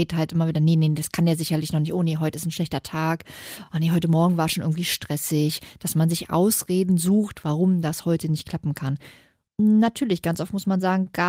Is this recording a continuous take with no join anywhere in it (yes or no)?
yes